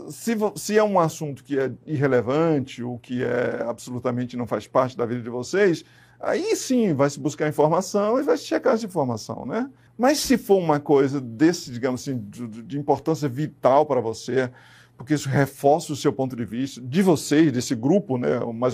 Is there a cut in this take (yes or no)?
yes